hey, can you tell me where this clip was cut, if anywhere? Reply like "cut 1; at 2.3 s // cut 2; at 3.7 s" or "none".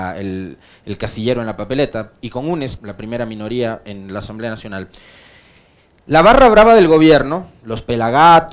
cut 1; at 2.8 s